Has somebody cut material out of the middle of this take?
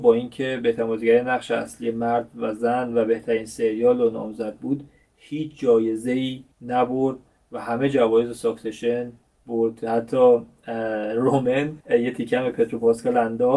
yes; 2 cuts; at 6.5 s, 11.8 s

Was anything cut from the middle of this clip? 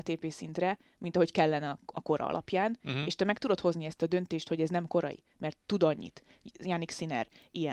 no; 0 cuts

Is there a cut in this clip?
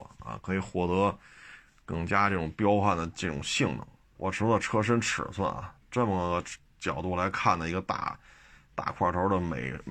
yes; 1 cut; at 4.1 s

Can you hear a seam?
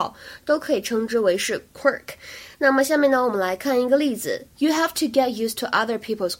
no; 0 cuts

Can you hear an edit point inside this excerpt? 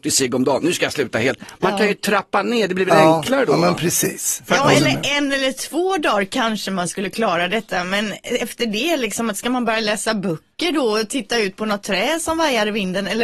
no; 0 cuts

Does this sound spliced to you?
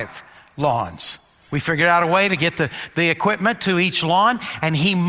yes; 1 cut; at 1.5 s

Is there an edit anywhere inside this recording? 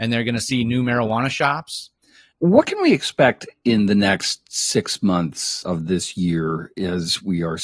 yes; 2 cuts; at 2.3 s, 5.6 s

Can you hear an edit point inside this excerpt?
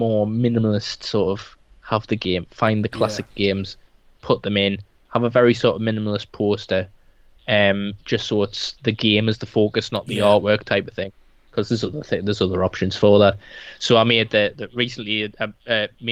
no; 0 cuts

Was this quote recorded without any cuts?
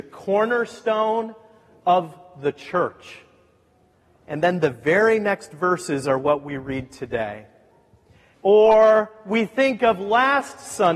no; 1 cut; at 8.3 s

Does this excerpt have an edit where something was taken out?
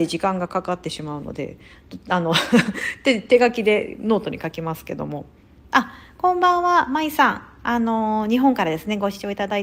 no; 0 cuts

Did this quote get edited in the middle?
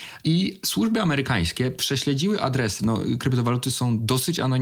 yes; 1 cut; at 2.8 s

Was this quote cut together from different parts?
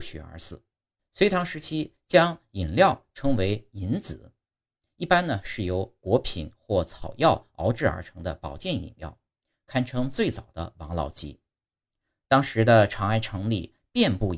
yes; 1 cut; at 1.0 s

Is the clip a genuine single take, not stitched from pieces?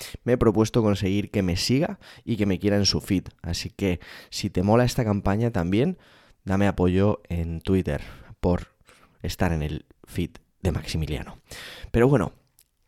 yes; 0 cuts

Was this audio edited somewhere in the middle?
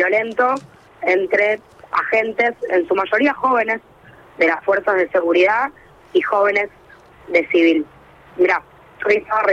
no; 0 cuts

